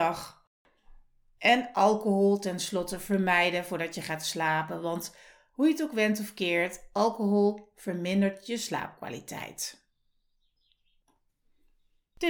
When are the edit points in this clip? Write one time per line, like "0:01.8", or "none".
none